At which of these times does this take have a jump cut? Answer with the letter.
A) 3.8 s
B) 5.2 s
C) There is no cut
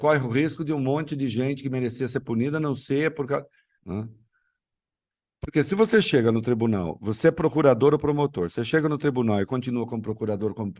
A